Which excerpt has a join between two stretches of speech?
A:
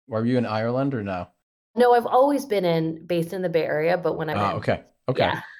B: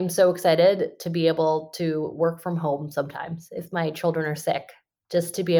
A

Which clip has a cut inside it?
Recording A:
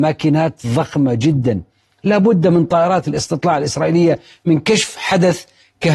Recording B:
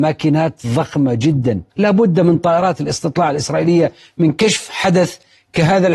B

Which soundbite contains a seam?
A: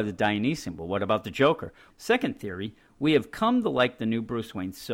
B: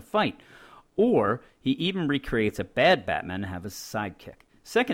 A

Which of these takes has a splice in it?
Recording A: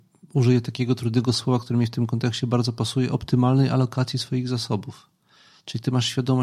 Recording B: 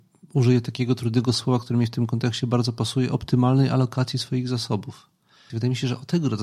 B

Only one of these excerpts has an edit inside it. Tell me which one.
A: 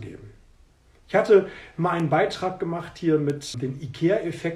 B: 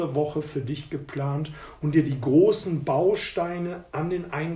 A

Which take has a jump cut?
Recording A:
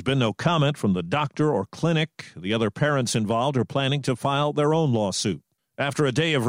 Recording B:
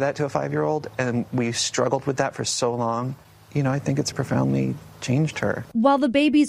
B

